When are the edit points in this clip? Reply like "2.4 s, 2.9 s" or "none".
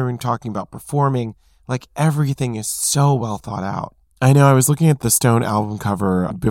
4.1 s